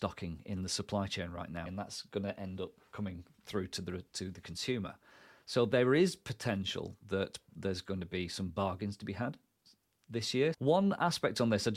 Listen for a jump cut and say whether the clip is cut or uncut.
cut